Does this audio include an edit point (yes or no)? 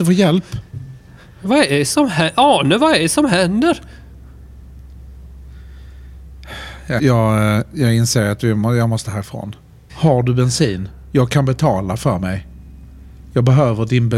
yes